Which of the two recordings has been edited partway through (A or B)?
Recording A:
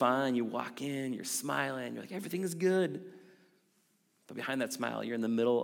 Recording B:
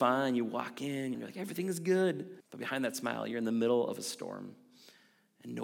B